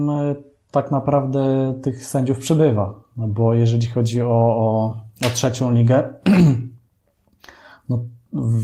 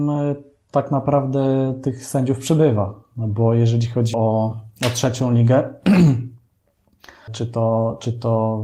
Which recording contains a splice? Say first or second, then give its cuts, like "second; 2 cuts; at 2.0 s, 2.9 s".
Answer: second; 2 cuts; at 4.1 s, 7.3 s